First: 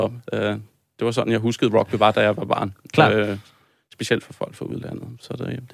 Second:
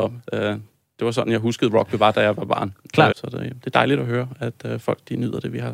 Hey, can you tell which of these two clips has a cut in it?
second; 1 cut; at 3.1 s

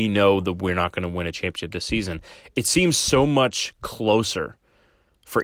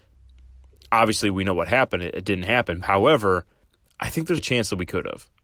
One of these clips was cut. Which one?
second; 2 cuts; at 2.8 s, 4.4 s

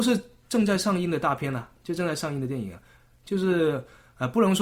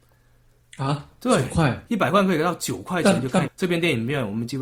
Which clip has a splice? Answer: second; 1 cut; at 3.4 s

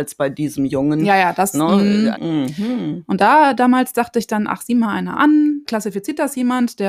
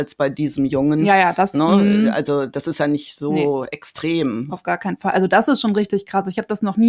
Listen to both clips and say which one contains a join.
first; 2 cuts; at 2.1 s, 5.6 s

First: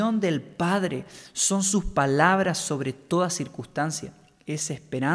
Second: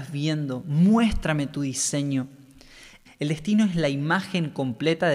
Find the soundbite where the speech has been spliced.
second; 1 cut; at 3.1 s

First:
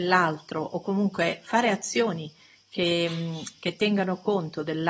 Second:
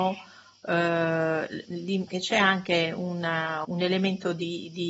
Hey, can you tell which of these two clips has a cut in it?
second; 2 cuts; at 2.1 s, 3.6 s

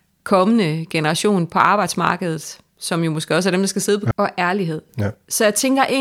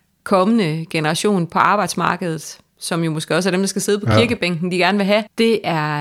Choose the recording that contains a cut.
first; 1 cut; at 4.1 s

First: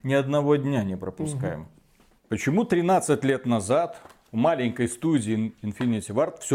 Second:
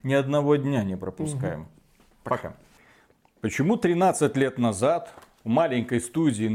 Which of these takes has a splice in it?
first; 1 cut; at 2.2 s

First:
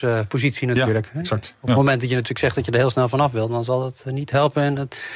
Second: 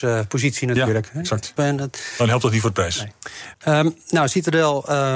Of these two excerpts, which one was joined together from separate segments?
second; 2 cuts; at 1.6 s, 3.5 s

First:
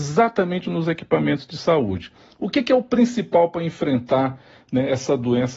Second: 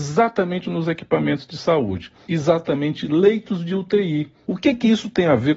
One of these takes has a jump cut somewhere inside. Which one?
second; 2 cuts; at 2.3 s, 4.5 s

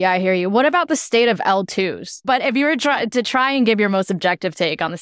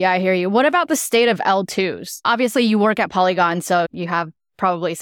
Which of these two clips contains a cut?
first; 1 cut; at 2.2 s

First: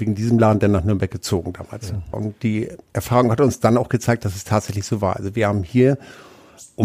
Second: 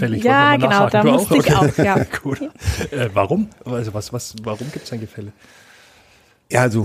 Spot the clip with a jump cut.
first; 1 cut; at 2.1 s

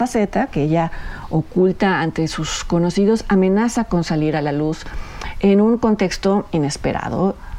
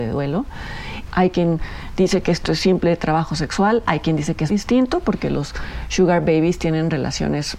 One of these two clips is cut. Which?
second; 2 cuts; at 1.1 s, 4.5 s

